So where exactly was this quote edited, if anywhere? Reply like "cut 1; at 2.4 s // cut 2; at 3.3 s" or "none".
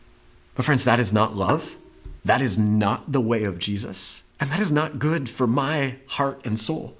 cut 1; at 2.2 s // cut 2; at 4.3 s